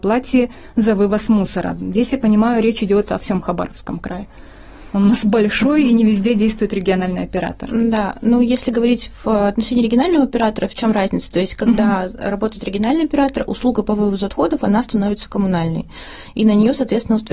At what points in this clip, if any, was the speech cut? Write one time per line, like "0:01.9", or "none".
none